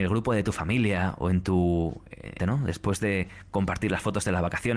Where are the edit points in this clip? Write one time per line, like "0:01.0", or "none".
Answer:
0:02.4